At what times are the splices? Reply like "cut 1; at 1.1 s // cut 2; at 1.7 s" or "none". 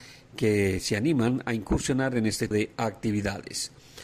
cut 1; at 2.5 s